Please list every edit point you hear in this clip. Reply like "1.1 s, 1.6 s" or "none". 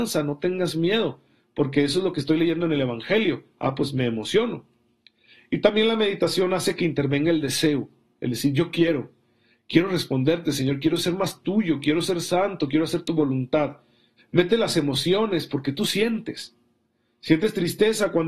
14.2 s